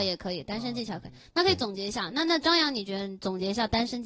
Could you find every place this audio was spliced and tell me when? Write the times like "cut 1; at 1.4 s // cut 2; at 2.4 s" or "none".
none